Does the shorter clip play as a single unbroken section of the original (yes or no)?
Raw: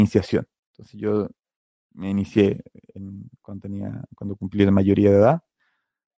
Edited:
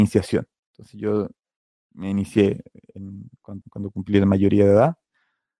no